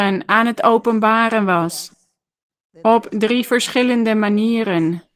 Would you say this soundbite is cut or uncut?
uncut